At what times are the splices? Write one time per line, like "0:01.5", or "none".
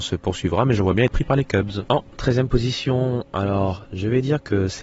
0:01.9